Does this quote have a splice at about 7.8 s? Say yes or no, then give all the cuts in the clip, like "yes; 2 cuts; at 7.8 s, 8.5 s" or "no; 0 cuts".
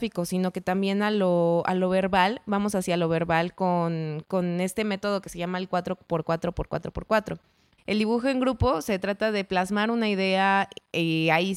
yes; 1 cut; at 7.8 s